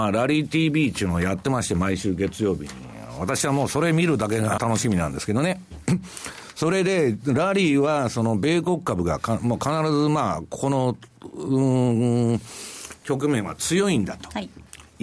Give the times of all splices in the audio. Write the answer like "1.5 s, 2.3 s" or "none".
4.6 s